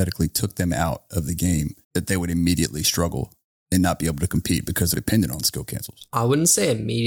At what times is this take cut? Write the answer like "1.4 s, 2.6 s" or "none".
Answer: 1.8 s, 4.9 s

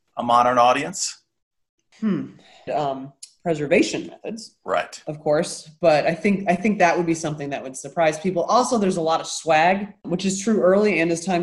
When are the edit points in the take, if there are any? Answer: 2.7 s, 10.0 s

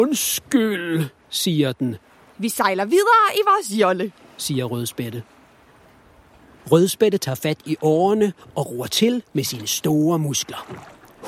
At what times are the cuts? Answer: 2.3 s

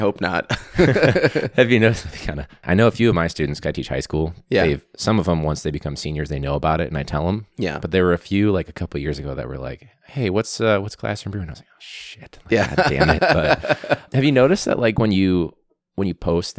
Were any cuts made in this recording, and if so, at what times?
none

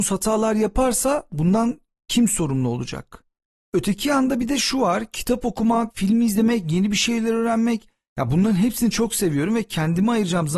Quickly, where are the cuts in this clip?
5.9 s

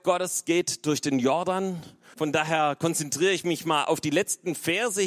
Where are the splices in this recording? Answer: 2.1 s

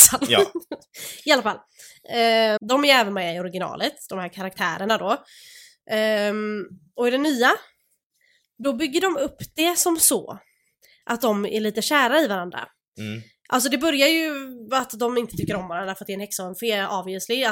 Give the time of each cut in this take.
2.6 s

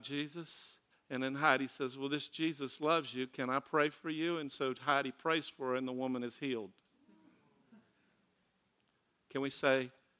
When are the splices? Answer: 0.9 s

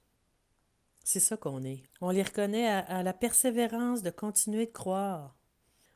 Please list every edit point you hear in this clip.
1.9 s

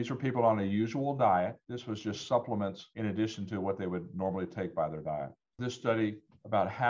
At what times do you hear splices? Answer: 5.6 s

